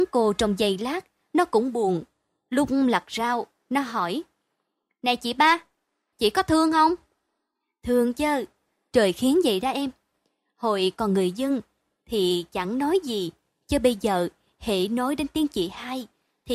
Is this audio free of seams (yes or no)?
no